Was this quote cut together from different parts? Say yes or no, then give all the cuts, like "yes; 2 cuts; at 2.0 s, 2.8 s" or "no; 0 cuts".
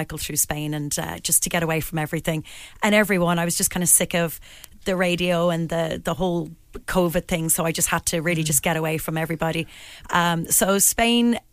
yes; 1 cut; at 10.0 s